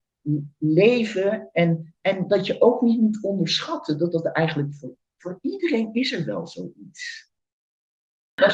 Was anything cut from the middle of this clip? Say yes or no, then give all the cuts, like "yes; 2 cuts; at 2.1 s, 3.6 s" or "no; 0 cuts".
no; 0 cuts